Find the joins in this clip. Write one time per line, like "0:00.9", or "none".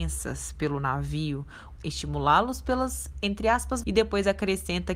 0:01.8
0:03.8

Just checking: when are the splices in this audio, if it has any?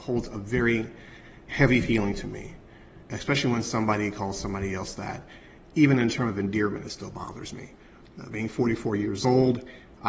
0:03.0
0:08.0

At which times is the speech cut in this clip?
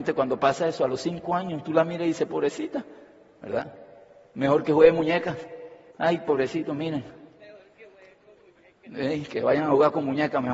0:05.9

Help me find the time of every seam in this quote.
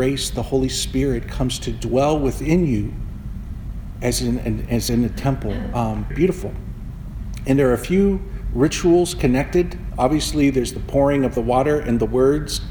0:06.1

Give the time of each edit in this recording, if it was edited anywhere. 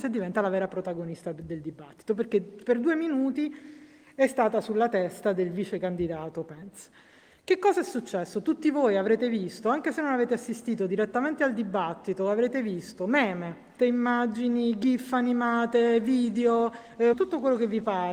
0:13.8
0:17.1

